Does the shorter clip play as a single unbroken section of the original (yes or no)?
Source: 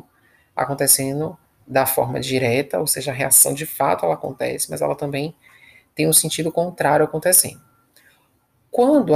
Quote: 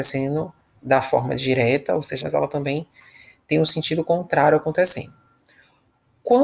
no